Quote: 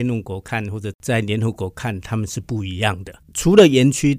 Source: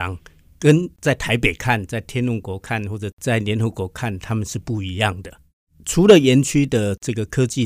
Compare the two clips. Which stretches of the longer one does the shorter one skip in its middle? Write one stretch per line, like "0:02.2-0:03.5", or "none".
0:05.4-0:05.7